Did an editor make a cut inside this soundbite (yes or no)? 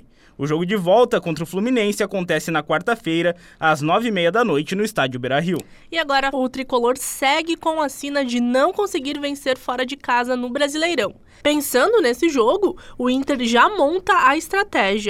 yes